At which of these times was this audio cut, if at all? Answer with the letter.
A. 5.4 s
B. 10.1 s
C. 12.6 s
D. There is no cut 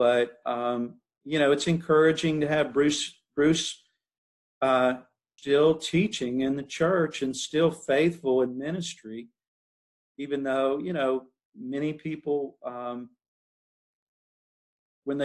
A